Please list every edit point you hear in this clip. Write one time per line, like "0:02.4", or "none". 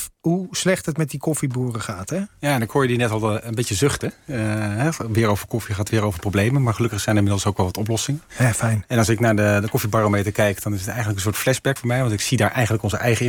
0:11.8